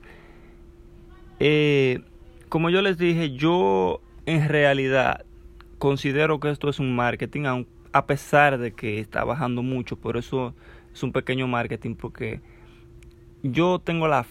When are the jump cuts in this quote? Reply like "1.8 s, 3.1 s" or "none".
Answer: none

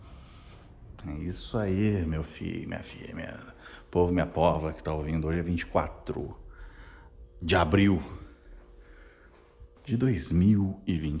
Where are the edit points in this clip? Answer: 1.0 s, 9.8 s

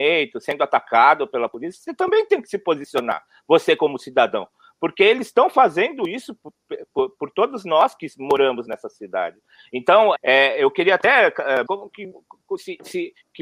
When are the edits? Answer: 10.2 s, 11.7 s

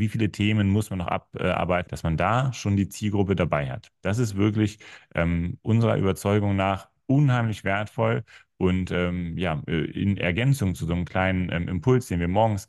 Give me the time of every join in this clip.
1.9 s

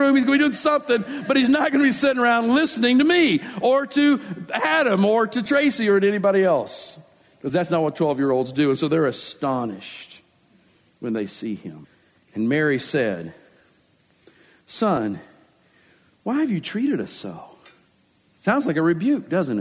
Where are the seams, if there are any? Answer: none

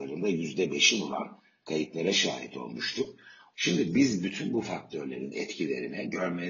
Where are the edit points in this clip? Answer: 3.5 s

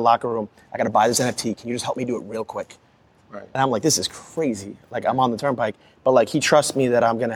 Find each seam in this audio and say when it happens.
none

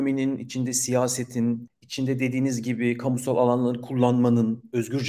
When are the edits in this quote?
none

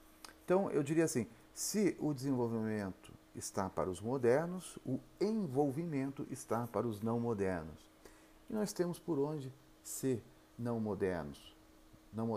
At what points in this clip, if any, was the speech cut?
none

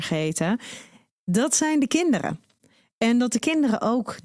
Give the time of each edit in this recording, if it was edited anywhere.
none

